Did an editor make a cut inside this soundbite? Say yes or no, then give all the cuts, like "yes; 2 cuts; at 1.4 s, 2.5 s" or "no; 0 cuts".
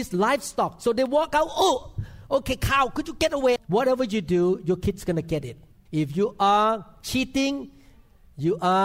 yes; 2 cuts; at 3.6 s, 5.7 s